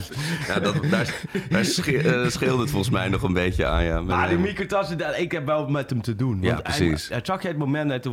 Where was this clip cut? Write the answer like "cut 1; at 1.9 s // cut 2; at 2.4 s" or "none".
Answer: none